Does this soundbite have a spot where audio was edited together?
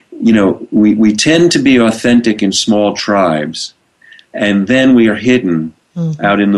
no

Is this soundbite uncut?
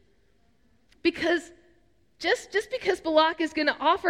yes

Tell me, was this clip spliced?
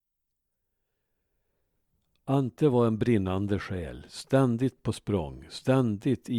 no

